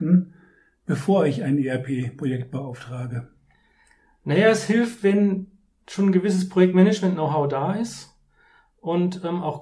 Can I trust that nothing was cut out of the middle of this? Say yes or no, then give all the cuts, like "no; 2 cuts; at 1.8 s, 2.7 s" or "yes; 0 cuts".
yes; 0 cuts